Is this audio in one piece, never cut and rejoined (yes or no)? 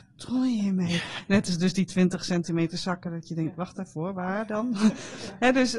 yes